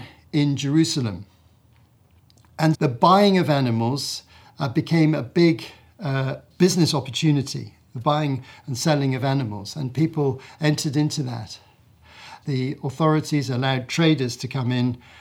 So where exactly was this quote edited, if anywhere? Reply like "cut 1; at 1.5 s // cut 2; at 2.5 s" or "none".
cut 1; at 2.7 s // cut 2; at 12.4 s

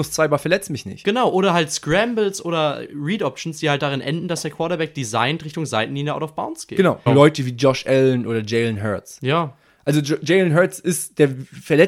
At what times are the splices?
cut 1; at 7.1 s

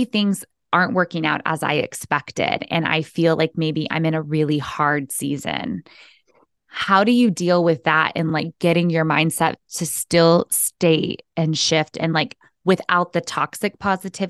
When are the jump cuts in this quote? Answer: none

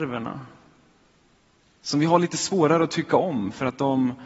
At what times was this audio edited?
none

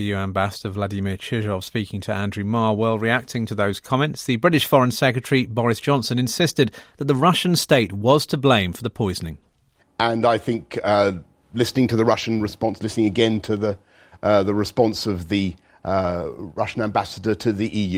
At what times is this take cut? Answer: cut 1; at 9.8 s

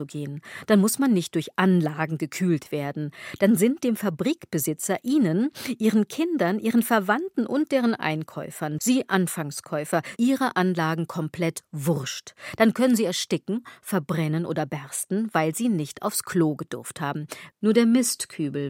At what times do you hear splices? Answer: cut 1; at 8.8 s // cut 2; at 10.2 s // cut 3; at 17.5 s

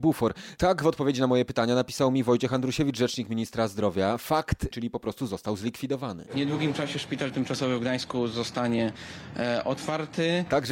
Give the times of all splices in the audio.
cut 1; at 4.7 s

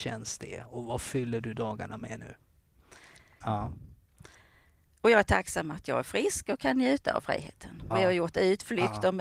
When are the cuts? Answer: cut 1; at 3.4 s // cut 2; at 7.9 s

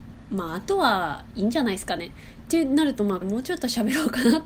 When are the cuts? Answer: cut 1; at 3.2 s

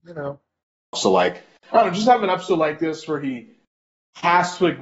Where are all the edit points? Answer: cut 1; at 0.9 s

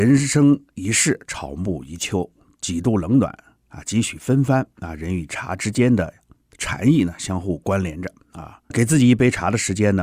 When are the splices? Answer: cut 1; at 8.7 s

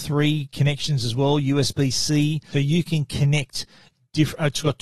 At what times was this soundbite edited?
cut 1; at 2.5 s

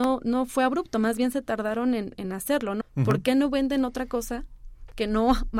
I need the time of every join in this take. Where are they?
cut 1; at 2.8 s

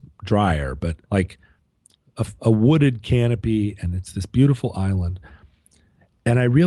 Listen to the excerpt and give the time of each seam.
cut 1; at 1.0 s // cut 2; at 2.4 s

